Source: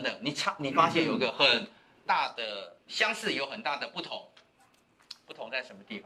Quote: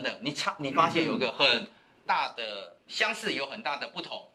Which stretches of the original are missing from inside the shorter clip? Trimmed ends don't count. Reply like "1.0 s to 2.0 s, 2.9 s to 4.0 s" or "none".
none